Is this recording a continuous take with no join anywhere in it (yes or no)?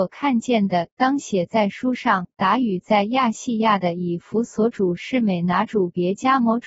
yes